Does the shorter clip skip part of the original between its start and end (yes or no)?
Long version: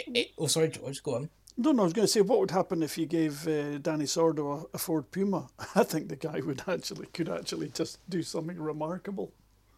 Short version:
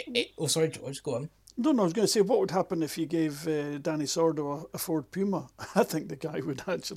no